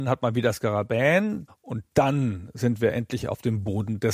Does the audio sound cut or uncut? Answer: cut